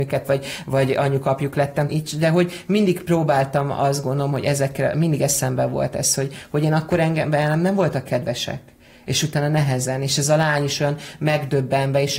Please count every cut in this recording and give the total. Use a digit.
1